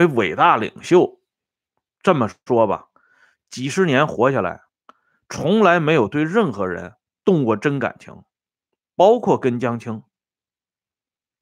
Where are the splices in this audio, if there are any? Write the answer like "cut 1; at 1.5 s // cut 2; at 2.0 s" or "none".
none